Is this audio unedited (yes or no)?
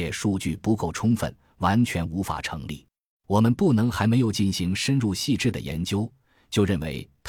no